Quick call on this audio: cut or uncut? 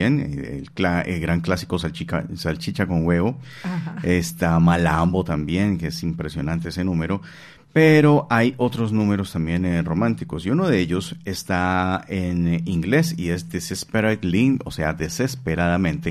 uncut